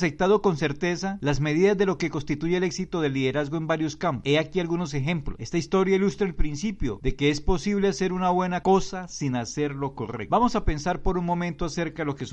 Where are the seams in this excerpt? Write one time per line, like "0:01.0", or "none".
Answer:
0:05.4